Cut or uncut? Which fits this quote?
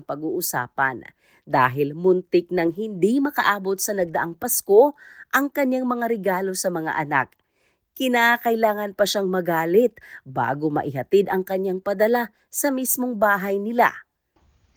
uncut